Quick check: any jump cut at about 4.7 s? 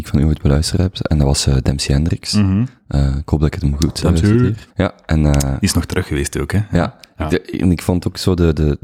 yes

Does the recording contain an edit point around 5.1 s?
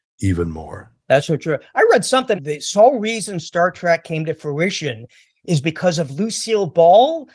no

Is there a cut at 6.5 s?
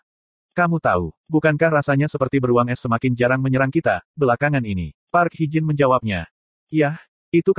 no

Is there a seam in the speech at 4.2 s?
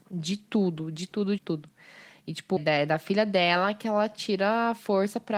no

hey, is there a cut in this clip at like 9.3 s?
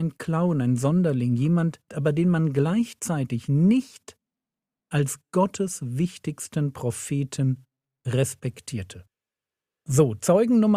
no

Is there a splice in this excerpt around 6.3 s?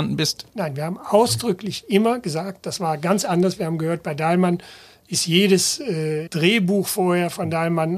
yes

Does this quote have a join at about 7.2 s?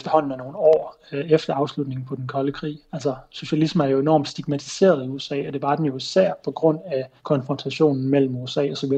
yes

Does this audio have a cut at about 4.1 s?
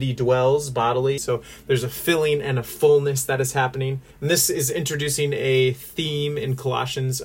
yes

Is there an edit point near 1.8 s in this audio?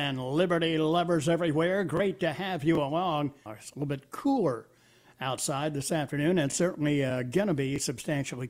no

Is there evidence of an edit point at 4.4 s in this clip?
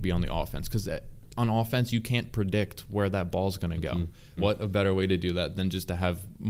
yes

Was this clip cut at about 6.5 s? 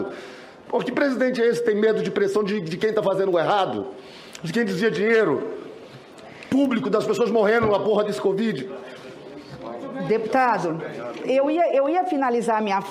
no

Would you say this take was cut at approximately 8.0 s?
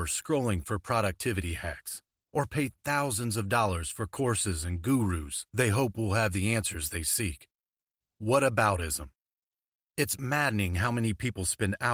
yes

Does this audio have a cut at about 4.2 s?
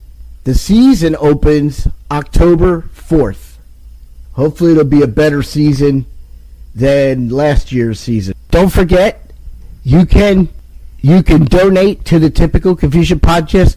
yes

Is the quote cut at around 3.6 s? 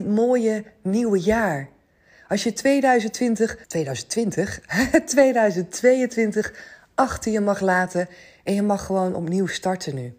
yes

